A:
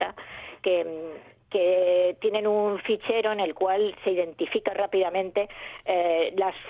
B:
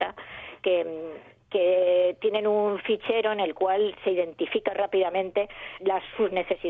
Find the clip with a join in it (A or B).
B